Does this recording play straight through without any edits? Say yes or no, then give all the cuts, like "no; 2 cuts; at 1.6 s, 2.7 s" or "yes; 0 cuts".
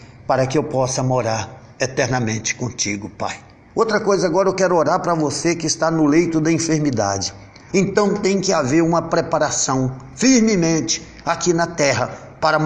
no; 2 cuts; at 3.7 s, 7.7 s